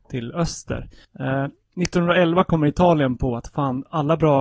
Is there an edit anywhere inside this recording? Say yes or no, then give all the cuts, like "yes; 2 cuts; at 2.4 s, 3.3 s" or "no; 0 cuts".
yes; 1 cut; at 1.0 s